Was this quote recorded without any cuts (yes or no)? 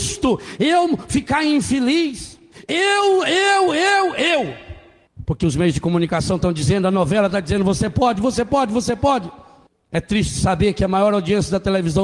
no